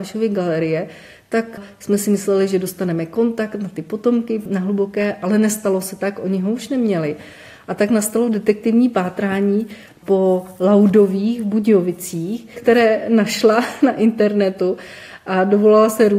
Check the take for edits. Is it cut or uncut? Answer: cut